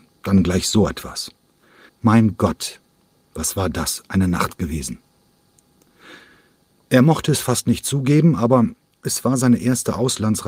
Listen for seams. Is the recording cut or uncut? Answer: cut